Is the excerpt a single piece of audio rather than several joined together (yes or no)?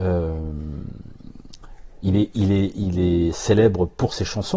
yes